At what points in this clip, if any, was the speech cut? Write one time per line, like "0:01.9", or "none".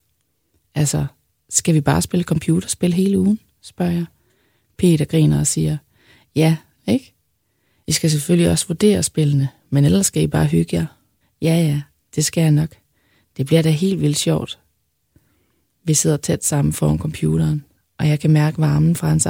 0:06.8
0:11.2